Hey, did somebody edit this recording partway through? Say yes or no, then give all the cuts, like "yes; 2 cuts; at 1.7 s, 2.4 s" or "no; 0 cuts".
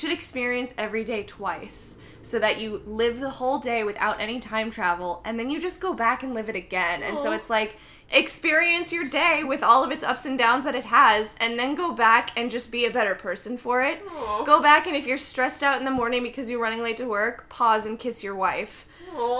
no; 0 cuts